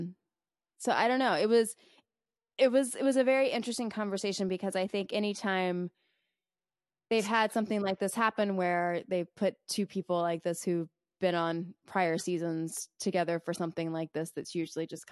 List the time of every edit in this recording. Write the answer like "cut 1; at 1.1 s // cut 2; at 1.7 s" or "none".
none